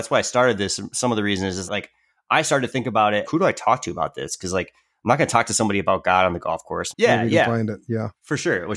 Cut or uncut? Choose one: cut